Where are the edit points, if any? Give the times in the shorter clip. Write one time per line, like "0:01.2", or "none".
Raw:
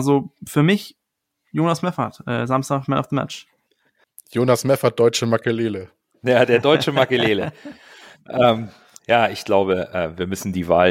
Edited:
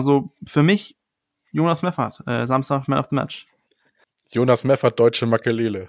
none

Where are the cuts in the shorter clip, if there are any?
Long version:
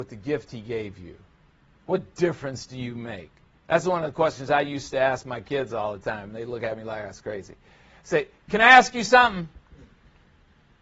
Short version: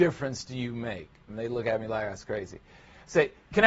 0:01.3

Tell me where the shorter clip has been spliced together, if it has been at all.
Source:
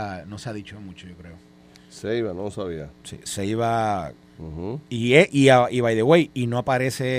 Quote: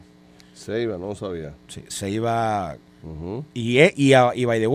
none

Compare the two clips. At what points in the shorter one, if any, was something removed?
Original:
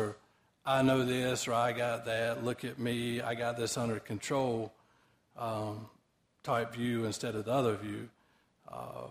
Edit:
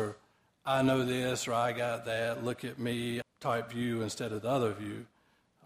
0:03.2

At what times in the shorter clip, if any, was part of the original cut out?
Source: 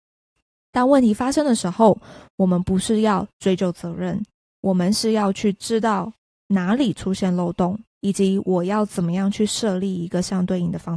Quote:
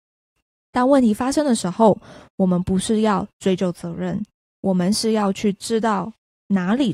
none

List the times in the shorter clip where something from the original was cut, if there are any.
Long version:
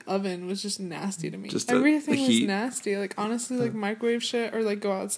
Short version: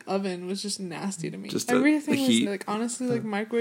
0:02.5

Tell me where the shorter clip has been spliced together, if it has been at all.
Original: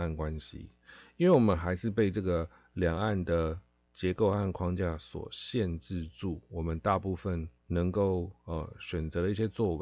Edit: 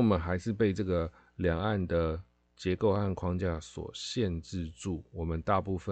none

